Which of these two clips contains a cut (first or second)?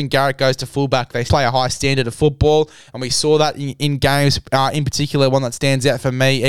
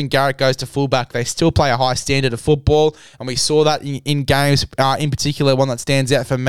first